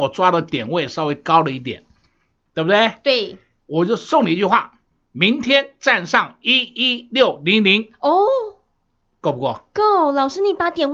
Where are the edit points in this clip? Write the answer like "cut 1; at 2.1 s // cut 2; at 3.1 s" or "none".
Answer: none